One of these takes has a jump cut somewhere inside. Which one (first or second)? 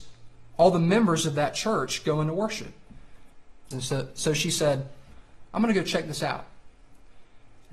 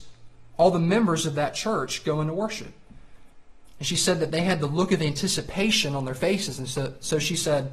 first